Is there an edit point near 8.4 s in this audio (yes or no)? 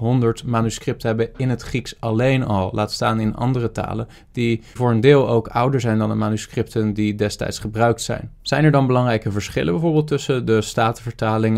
yes